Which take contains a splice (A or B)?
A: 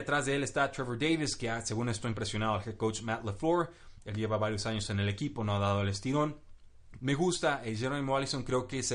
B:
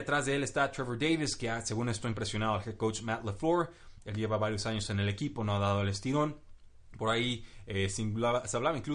A